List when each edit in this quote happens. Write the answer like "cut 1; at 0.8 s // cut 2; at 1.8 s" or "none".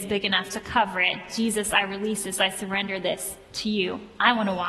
none